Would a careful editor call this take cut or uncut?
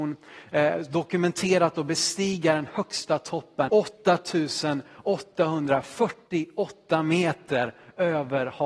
cut